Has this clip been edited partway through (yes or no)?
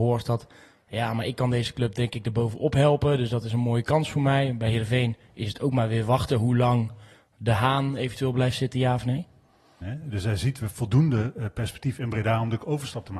yes